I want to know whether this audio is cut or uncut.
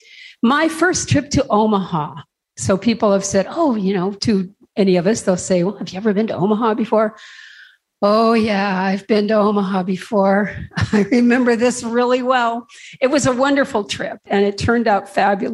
cut